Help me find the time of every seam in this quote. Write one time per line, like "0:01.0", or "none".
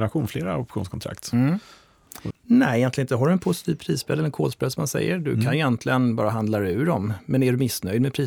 0:02.3